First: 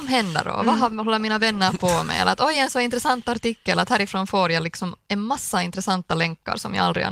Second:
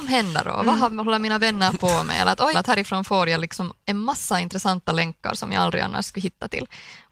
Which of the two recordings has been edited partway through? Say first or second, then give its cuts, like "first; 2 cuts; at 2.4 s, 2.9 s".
second; 1 cut; at 2.5 s